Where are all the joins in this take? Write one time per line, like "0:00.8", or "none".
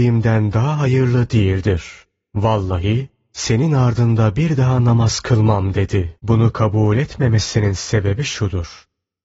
0:06.2